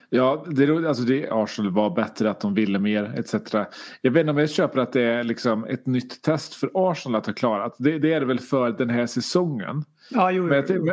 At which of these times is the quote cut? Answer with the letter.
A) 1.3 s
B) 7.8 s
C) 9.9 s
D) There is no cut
A